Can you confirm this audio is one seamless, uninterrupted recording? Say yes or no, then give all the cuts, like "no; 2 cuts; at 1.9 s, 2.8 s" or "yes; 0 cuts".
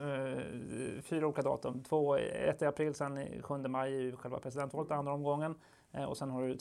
yes; 0 cuts